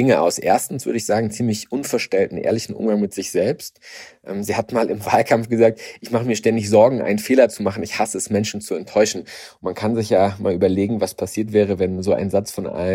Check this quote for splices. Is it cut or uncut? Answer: uncut